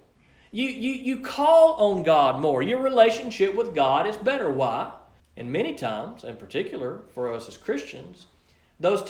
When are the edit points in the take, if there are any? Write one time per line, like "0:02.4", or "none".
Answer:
0:05.2